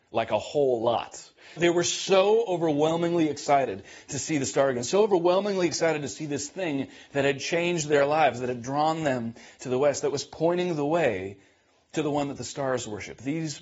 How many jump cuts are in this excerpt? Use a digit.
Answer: 1